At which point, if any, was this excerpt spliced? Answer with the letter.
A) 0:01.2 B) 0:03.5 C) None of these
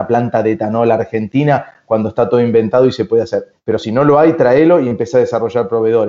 B